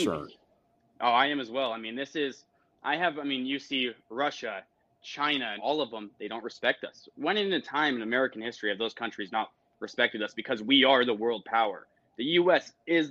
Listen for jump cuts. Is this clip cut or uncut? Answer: cut